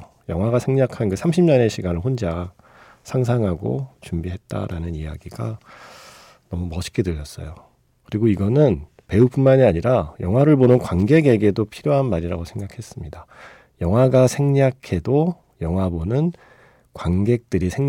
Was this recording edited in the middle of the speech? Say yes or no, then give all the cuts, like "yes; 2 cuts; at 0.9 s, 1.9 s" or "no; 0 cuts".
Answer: no; 0 cuts